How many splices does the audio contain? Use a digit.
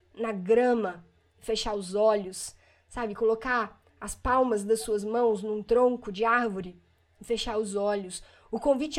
0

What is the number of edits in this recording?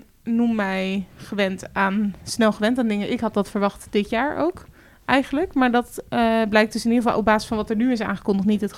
0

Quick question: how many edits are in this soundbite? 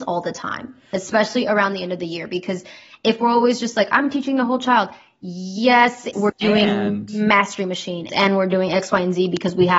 2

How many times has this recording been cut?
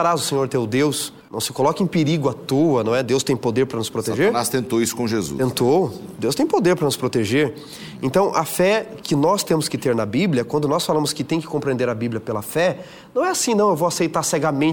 0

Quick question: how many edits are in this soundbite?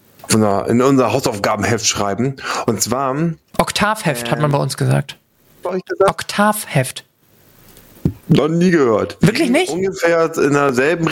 1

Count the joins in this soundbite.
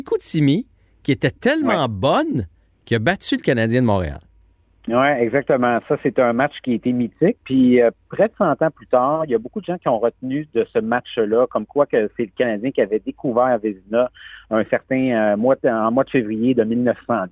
0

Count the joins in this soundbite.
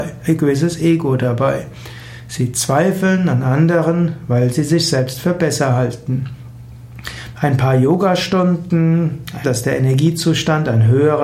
2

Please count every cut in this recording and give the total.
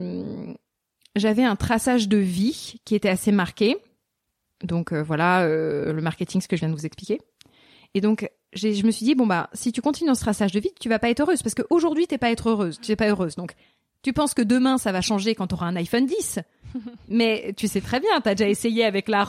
0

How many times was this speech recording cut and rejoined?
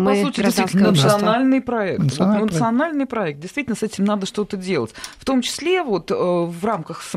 0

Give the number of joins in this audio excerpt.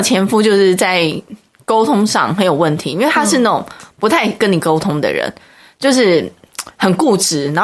0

